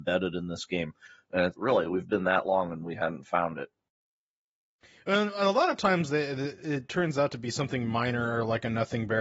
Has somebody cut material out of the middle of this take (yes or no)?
yes